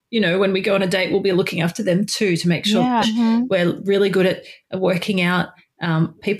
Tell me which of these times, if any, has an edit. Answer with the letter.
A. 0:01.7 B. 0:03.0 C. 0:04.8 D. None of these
B